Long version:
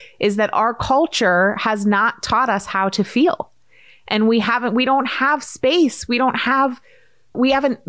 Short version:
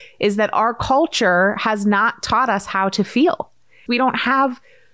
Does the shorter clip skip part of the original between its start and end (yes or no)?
yes